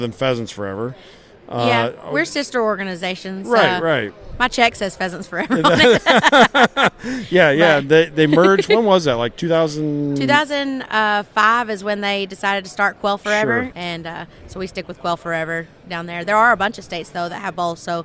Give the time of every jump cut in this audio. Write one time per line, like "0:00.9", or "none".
0:13.7